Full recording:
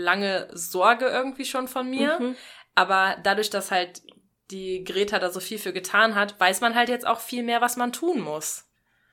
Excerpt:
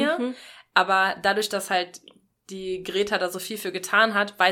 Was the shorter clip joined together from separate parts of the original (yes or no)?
no